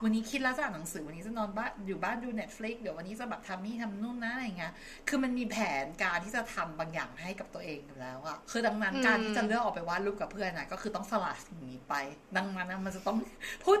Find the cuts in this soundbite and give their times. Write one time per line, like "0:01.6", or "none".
0:08.4
0:12.2